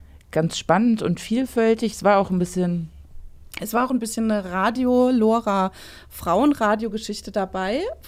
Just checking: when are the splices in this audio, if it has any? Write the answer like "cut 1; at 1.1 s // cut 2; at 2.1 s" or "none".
none